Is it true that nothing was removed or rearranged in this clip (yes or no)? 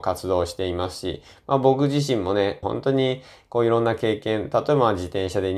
no